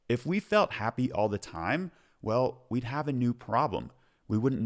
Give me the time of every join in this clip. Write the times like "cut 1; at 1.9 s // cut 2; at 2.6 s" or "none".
none